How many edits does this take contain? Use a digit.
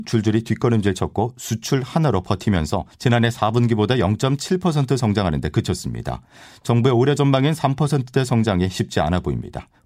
0